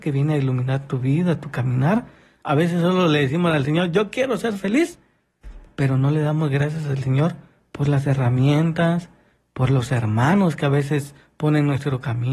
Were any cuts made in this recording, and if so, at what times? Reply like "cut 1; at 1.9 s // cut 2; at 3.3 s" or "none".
cut 1; at 2.4 s